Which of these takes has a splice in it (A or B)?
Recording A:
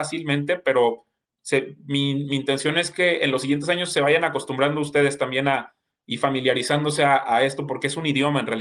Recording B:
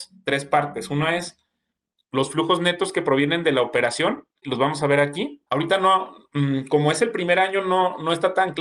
B